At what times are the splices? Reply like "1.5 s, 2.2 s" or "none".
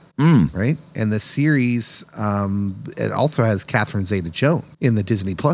none